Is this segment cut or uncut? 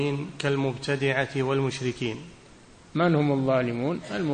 uncut